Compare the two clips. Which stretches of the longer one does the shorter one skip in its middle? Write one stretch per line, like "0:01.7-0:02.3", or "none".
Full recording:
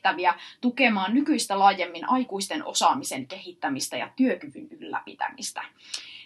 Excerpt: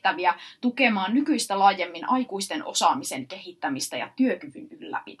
none

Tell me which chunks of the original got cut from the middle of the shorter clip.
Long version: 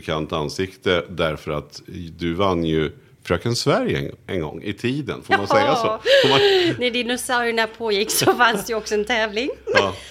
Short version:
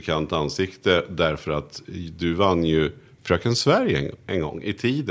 none

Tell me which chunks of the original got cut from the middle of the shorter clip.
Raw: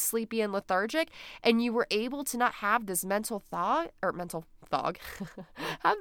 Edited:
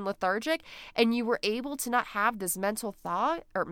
none

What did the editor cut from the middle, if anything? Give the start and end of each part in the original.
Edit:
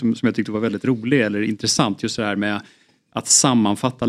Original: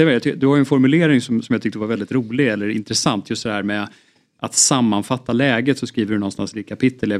none

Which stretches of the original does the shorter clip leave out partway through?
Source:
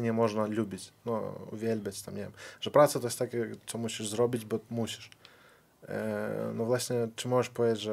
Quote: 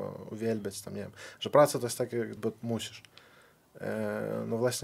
0:03.6-0:04.4

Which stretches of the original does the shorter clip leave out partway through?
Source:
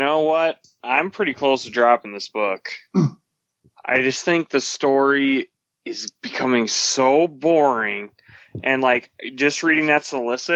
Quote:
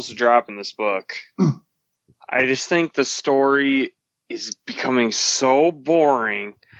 none

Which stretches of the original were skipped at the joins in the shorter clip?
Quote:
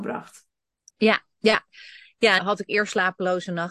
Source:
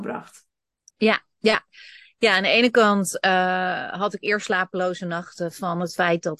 0:02.4-0:03.9

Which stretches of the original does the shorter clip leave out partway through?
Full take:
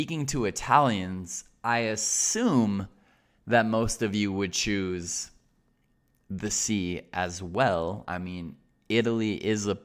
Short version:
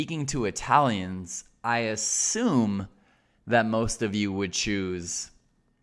none

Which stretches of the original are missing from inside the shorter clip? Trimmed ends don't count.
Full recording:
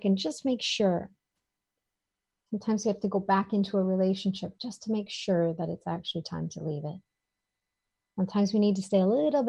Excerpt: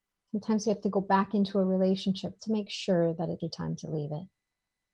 0:04.6-0:04.8
0:05.8-0:06.1

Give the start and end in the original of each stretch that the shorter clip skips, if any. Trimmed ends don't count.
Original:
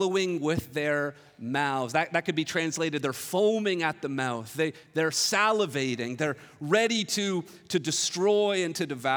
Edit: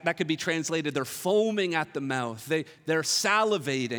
none

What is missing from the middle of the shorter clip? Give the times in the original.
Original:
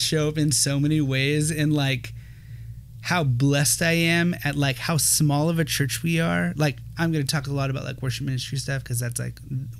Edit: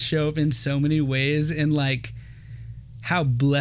none

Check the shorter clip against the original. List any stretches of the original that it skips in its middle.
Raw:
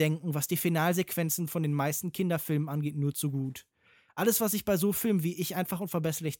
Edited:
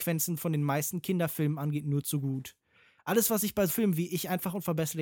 0:04.8-0:04.9

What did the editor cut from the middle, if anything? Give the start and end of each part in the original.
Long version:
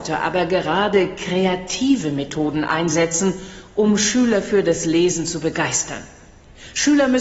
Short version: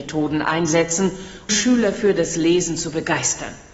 0:03.7-0:04.0

